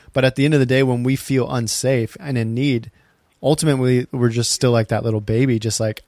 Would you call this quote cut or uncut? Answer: uncut